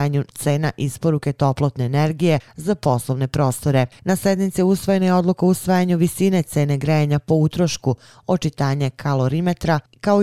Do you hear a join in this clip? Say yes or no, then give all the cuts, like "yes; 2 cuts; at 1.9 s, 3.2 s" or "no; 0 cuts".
yes; 1 cut; at 4.0 s